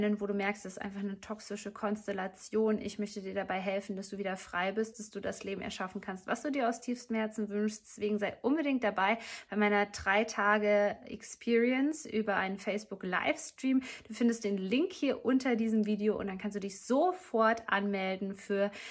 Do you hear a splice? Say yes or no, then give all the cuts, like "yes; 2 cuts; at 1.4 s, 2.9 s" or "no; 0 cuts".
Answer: yes; 1 cut; at 4.9 s